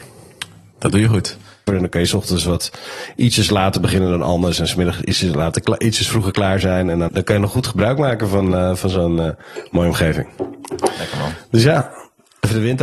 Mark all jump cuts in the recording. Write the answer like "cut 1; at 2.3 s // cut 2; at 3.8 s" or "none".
cut 1; at 1.7 s // cut 2; at 7.1 s